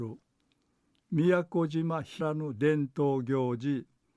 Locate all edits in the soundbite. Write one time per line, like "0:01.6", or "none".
0:02.2